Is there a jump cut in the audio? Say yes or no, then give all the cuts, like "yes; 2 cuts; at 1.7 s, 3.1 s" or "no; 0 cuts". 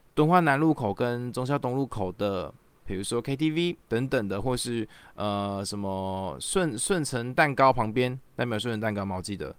yes; 1 cut; at 3.8 s